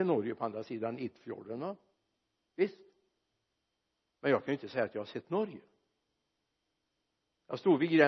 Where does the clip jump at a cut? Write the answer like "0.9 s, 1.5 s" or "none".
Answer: none